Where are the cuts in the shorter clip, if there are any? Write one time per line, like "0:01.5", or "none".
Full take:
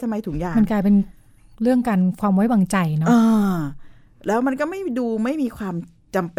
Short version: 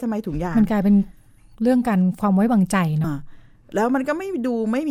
0:03.0